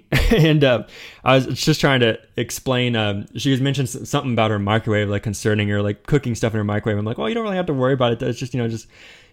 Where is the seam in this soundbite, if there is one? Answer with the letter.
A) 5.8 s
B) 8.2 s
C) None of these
C